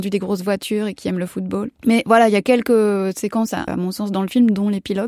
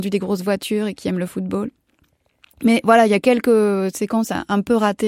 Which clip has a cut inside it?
first; 2 cuts; at 1.8 s, 3.7 s

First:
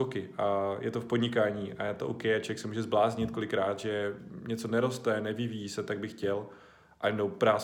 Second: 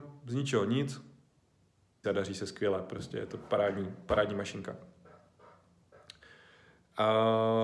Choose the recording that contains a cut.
second; 1 cut; at 2.0 s

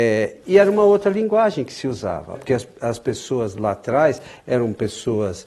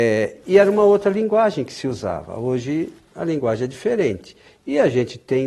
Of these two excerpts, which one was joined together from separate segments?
first; 1 cut; at 2.3 s

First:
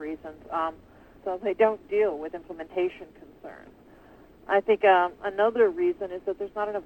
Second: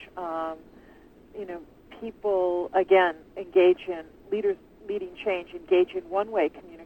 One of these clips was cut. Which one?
first; 1 cut; at 1.2 s

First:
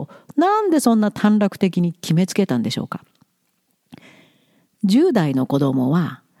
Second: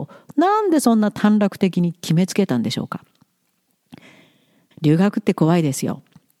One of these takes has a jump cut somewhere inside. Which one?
second; 1 cut; at 4.7 s

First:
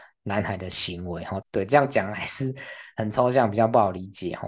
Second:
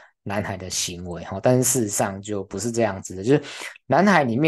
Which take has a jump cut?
first; 1 cut; at 1.4 s

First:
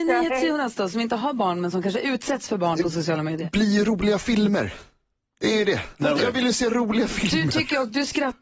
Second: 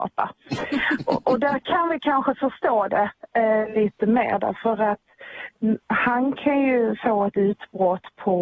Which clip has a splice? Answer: first; 1 cut; at 6.2 s

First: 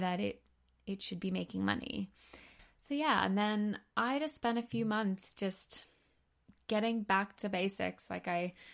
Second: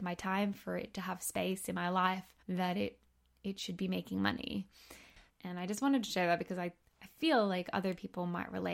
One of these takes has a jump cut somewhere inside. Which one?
second; 2 cuts; at 2.4 s, 5.3 s

